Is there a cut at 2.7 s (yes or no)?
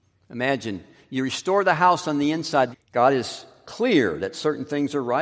yes